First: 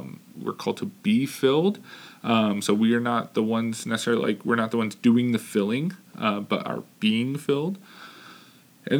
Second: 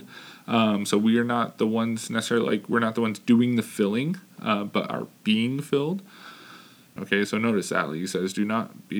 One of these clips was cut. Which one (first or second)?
second